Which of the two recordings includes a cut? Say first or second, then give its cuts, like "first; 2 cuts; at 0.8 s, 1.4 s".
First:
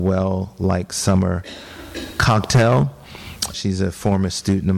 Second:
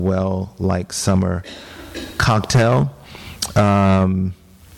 first; 1 cut; at 3.5 s